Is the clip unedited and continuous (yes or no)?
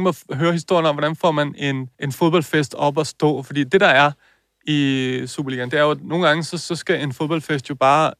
no